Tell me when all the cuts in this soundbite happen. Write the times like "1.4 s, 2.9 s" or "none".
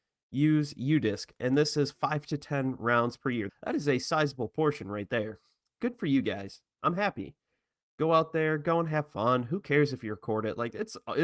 3.5 s